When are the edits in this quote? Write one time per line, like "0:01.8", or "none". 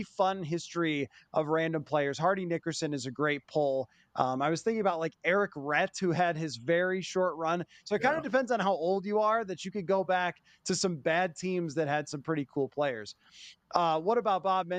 none